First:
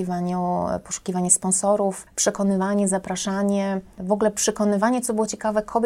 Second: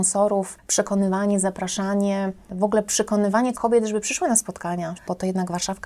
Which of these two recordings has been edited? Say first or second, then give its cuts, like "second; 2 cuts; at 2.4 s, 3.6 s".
second; 2 cuts; at 3.5 s, 4.9 s